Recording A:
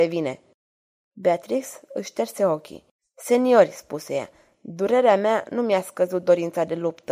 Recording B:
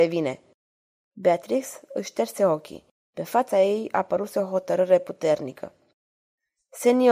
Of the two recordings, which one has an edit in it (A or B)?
A